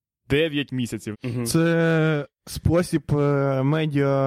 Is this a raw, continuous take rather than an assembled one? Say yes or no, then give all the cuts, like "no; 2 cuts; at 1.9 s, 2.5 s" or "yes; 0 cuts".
no; 1 cut; at 1.1 s